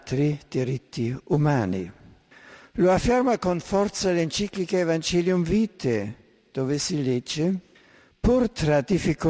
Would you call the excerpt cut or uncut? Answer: uncut